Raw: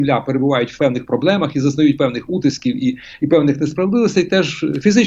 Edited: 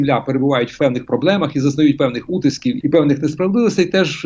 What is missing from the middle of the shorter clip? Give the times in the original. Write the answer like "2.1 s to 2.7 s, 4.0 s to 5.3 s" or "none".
2.8 s to 3.2 s